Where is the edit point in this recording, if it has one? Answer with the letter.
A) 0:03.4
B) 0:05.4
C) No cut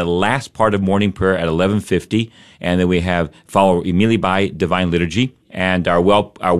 B